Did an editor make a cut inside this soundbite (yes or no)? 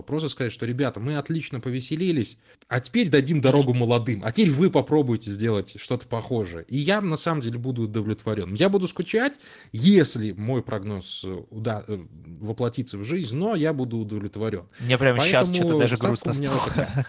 no